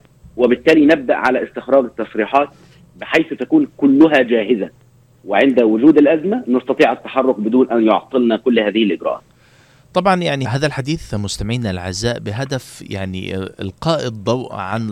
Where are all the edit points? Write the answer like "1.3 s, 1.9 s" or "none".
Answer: 10.4 s